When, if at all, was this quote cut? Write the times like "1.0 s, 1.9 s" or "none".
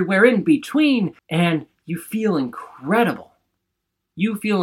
1.2 s